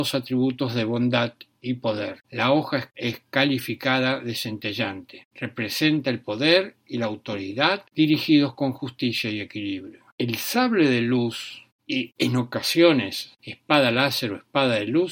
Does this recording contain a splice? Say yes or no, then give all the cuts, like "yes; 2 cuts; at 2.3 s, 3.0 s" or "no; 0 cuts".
yes; 1 cut; at 2.2 s